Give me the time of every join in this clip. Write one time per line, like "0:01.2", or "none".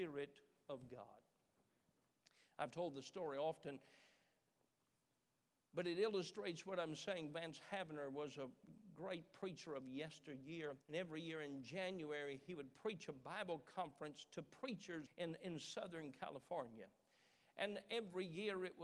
0:10.8
0:15.1